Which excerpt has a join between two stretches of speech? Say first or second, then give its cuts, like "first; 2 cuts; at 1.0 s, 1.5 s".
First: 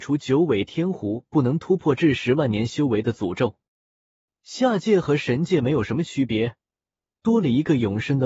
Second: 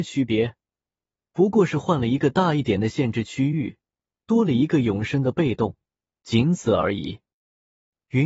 first; 1 cut; at 7.1 s